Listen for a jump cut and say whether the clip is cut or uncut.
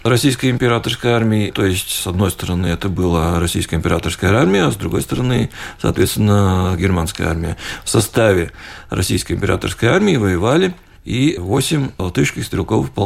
uncut